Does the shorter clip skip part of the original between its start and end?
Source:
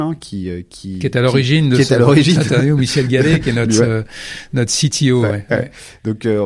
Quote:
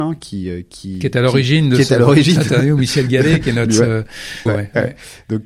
yes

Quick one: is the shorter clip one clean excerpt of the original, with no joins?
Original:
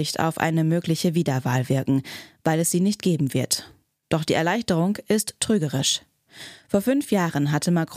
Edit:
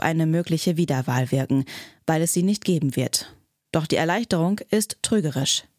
yes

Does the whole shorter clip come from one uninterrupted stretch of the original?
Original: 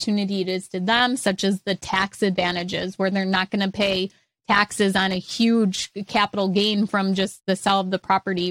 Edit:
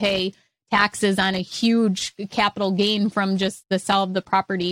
yes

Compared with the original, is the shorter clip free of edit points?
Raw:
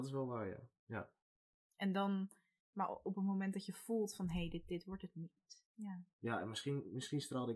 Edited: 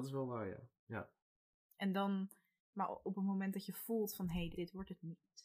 no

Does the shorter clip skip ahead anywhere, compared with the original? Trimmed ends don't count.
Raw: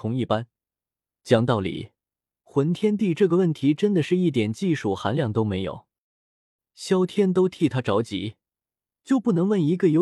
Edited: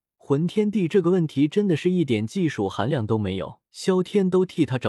yes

